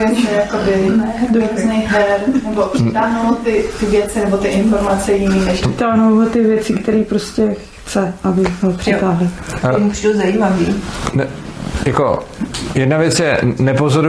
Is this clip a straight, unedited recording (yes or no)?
yes